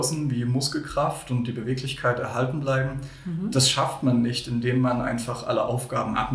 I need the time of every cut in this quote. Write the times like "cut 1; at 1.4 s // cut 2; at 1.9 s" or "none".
none